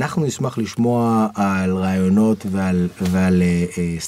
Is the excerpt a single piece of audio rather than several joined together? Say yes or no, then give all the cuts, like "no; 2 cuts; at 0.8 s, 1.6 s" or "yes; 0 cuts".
yes; 0 cuts